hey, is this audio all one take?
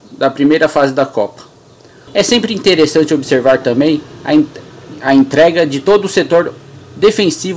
no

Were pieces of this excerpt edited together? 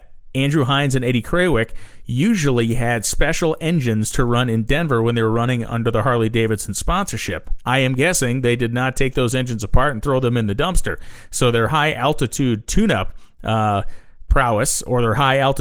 no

